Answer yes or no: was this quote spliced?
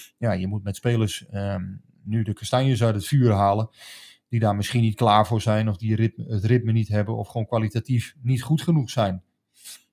no